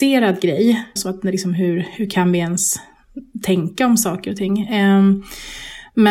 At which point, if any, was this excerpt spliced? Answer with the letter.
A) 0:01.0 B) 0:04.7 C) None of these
A